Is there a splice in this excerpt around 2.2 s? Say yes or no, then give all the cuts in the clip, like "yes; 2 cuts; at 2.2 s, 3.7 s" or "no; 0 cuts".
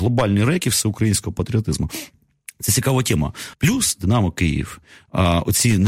no; 1 cut; at 3.5 s